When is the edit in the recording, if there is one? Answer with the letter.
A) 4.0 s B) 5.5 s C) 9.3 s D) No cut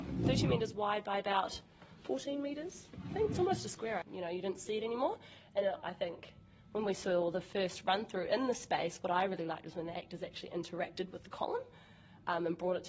A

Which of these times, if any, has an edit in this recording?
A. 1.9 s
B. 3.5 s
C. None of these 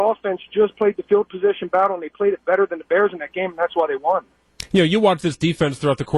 C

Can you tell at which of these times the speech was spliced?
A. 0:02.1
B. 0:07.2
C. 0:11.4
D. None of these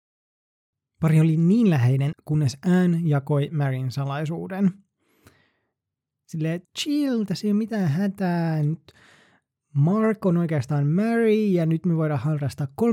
A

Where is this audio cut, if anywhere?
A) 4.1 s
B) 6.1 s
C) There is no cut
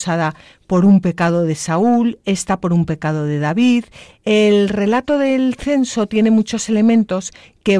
A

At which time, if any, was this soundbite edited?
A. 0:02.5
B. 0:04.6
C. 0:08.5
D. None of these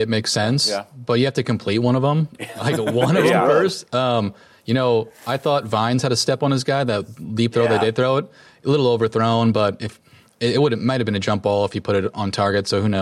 D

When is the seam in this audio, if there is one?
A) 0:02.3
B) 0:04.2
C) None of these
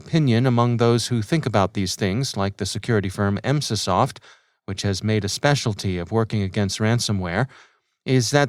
C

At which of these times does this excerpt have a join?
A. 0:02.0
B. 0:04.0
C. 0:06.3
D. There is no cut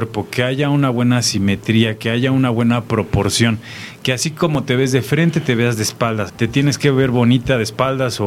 C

